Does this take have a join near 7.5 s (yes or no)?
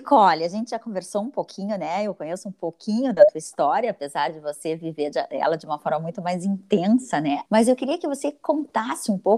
yes